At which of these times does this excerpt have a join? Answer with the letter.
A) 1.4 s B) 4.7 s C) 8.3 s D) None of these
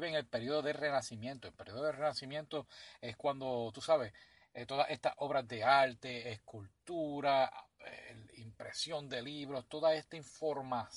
D